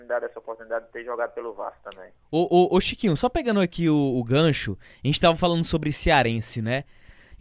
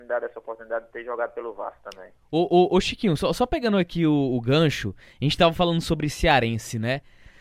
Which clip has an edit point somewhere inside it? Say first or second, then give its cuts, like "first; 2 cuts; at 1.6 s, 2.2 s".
first; 1 cut; at 3.2 s